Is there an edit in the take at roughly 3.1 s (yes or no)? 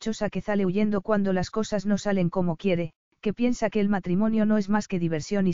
yes